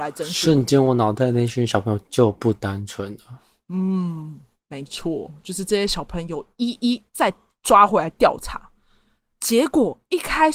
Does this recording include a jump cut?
no; 0 cuts

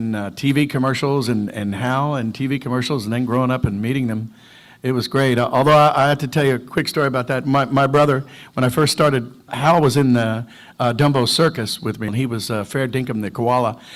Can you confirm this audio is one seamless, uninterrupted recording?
no; 2 cuts; at 9.5 s, 12.1 s

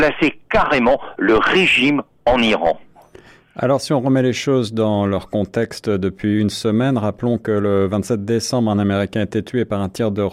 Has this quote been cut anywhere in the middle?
no; 0 cuts

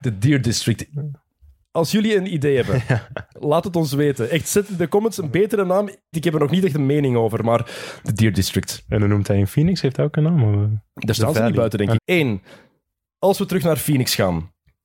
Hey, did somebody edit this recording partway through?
yes; 2 cuts; at 6.1 s, 12.0 s

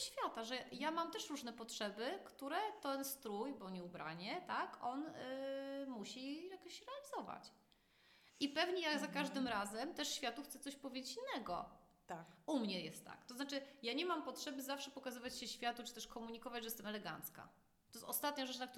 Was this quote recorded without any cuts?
yes; 0 cuts

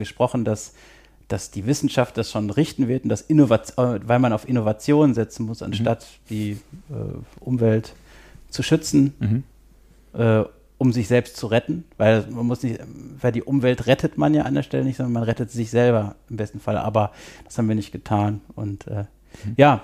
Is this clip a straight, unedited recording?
yes; 0 cuts

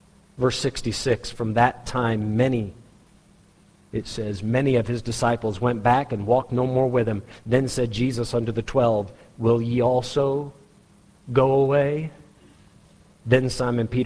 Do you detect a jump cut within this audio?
no; 0 cuts

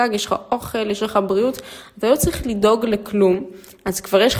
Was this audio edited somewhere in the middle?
no; 0 cuts

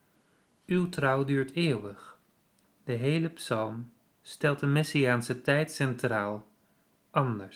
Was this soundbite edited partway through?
yes; 1 cut; at 2.7 s

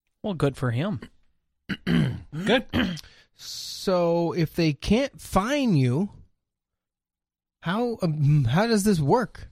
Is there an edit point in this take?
no; 0 cuts

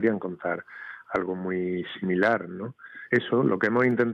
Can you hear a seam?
yes; 1 cut; at 3.1 s

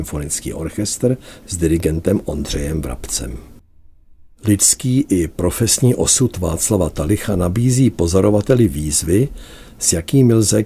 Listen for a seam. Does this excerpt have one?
no; 0 cuts

